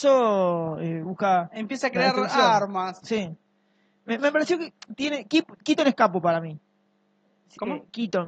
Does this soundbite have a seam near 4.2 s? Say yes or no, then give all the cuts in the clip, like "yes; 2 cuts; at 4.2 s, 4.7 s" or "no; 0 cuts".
yes; 1 cut; at 4.2 s